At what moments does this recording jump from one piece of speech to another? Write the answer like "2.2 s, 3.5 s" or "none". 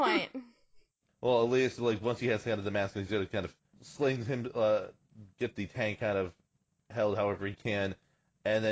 none